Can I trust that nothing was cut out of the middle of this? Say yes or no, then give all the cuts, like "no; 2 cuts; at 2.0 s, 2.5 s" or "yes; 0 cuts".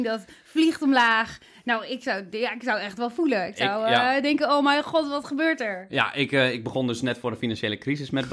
yes; 0 cuts